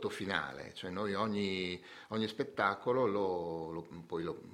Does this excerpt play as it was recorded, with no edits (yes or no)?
yes